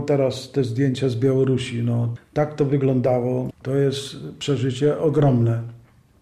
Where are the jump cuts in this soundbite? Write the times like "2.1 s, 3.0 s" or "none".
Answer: 2.2 s, 3.6 s